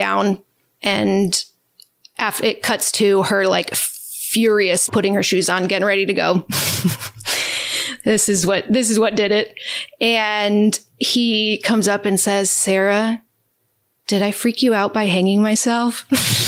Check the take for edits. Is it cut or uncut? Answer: cut